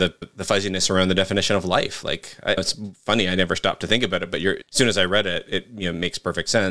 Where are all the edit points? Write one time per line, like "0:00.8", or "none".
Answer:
none